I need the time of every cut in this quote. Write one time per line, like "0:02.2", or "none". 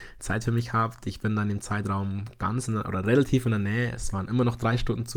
none